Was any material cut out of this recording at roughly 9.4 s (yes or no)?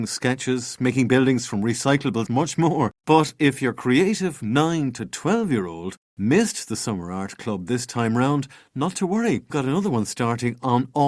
no